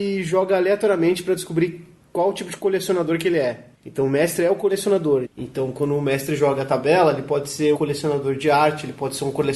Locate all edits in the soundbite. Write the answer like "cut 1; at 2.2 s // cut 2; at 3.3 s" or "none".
cut 1; at 3.7 s // cut 2; at 5.2 s // cut 3; at 7.7 s